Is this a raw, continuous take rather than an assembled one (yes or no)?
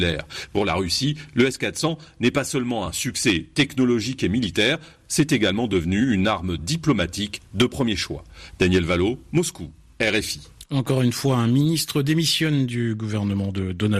yes